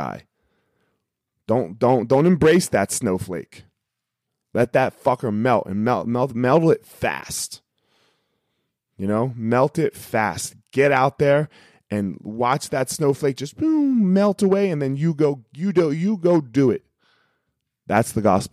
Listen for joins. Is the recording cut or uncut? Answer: uncut